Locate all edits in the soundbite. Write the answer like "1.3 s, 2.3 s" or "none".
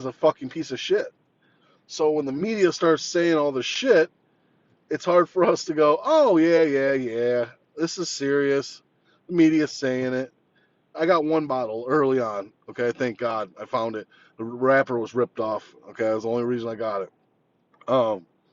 10.9 s